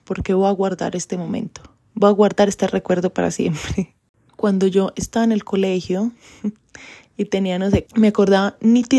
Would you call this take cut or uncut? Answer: cut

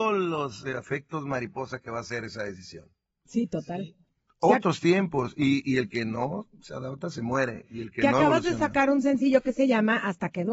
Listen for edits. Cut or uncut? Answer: cut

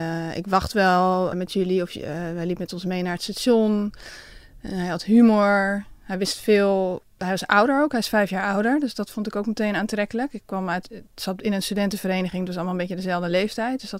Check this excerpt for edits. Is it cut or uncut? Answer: cut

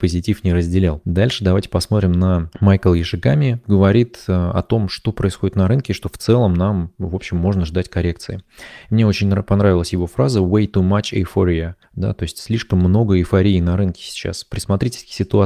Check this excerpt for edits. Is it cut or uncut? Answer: cut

